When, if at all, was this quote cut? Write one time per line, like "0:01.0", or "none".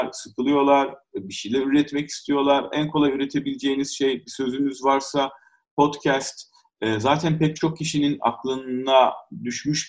none